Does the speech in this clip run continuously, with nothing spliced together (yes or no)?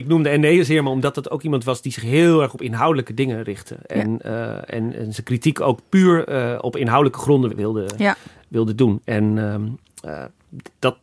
no